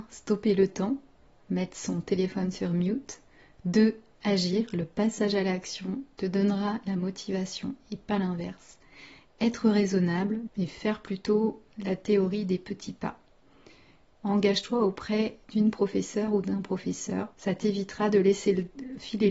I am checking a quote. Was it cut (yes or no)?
yes